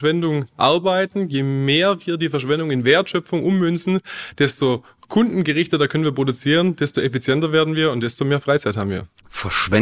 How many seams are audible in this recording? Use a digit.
0